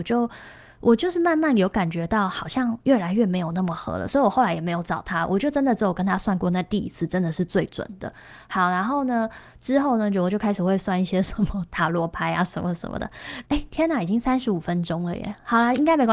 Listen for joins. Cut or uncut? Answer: cut